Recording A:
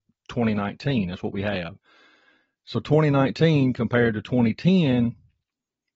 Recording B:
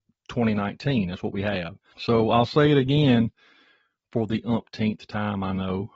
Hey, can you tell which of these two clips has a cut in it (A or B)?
B